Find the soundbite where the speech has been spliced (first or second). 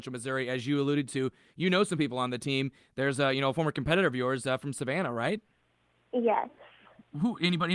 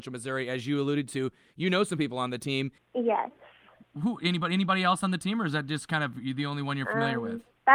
second